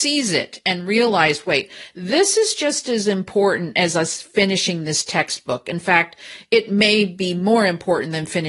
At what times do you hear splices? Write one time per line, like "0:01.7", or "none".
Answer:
none